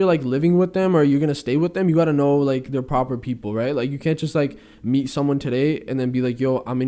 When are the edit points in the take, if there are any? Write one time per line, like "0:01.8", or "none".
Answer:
none